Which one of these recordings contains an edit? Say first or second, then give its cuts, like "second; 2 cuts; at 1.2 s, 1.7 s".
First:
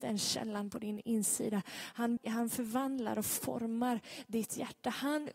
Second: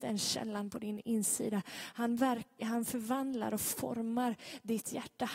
first; 1 cut; at 2.2 s